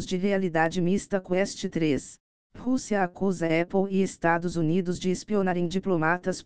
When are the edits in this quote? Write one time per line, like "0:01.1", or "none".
0:02.5